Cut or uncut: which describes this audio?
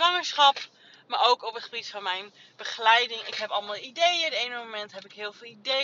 uncut